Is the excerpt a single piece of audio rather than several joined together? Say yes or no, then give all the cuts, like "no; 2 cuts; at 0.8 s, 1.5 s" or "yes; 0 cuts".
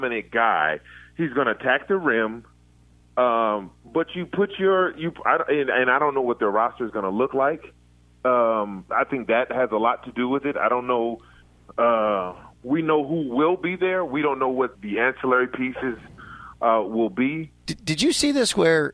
no; 2 cuts; at 14.8 s, 17.6 s